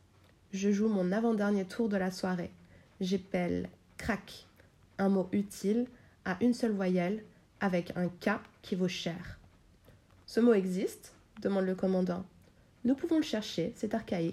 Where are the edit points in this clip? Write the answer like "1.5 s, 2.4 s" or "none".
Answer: none